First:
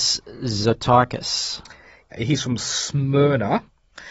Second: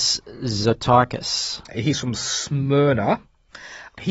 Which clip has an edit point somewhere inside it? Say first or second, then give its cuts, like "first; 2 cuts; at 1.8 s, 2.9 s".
second; 1 cut; at 1.7 s